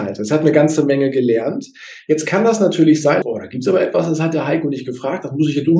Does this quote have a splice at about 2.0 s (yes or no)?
no